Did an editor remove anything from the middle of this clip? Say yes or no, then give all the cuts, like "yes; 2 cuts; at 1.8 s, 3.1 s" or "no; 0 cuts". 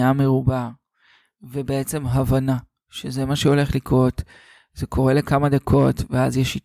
no; 0 cuts